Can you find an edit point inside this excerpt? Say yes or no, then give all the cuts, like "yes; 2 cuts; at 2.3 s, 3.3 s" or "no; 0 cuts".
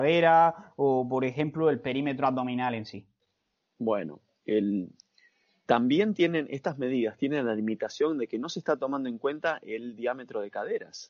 yes; 1 cut; at 5.7 s